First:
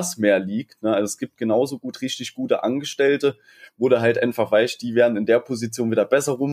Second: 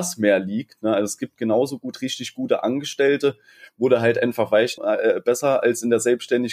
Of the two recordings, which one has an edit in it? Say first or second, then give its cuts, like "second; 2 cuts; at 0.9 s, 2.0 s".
second; 1 cut; at 4.8 s